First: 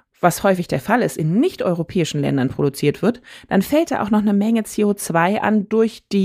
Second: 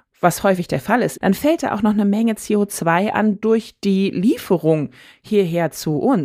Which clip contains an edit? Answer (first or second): second